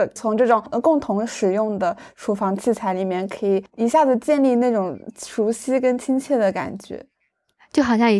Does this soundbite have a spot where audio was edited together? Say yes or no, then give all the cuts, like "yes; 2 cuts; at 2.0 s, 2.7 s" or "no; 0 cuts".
no; 0 cuts